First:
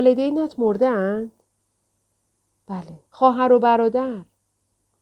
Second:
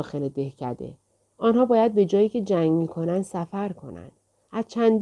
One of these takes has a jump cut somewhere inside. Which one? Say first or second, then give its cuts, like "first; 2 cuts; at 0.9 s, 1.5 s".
first; 1 cut; at 3.1 s